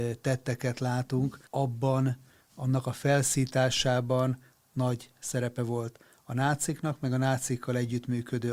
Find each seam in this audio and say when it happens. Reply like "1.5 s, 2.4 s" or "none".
1.5 s